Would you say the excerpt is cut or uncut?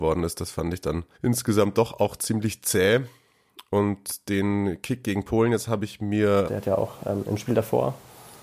cut